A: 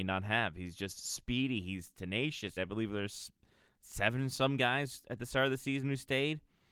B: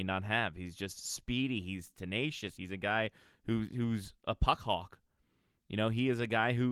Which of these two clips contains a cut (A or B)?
A